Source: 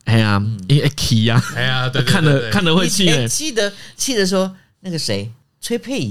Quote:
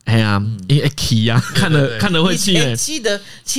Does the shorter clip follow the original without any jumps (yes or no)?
no